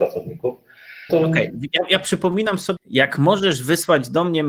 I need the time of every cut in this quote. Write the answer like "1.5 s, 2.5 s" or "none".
1.1 s, 2.8 s